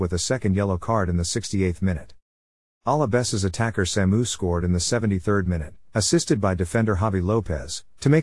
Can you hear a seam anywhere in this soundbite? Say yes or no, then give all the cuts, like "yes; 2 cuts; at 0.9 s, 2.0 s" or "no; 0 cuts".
no; 0 cuts